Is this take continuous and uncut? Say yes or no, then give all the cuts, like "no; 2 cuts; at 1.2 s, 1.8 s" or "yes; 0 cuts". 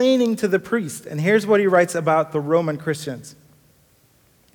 yes; 0 cuts